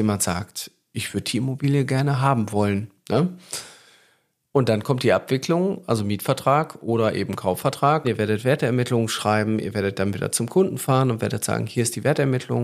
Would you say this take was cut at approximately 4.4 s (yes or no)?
no